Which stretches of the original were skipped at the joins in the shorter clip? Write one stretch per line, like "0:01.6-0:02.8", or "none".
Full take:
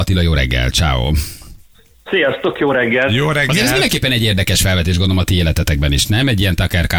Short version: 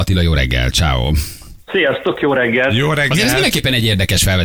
0:01.6-0:02.0